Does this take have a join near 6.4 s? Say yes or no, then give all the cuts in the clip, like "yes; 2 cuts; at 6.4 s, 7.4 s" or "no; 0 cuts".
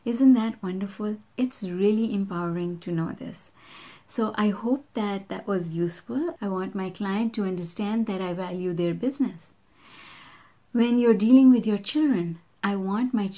yes; 1 cut; at 6.4 s